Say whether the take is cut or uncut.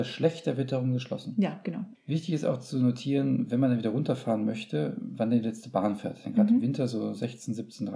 cut